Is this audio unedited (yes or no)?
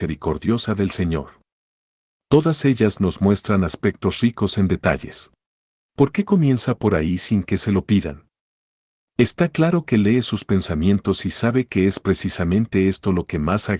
no